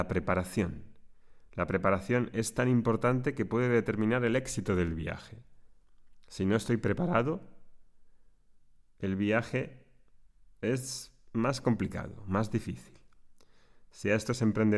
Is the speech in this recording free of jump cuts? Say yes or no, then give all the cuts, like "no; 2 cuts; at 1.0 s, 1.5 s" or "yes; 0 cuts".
yes; 0 cuts